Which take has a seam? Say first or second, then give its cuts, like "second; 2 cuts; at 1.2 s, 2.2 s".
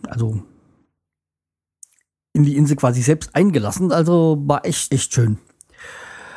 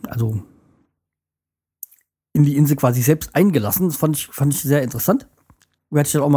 first; 2 cuts; at 3.9 s, 4.9 s